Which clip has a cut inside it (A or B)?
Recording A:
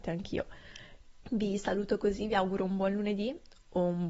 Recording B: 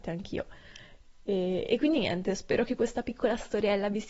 A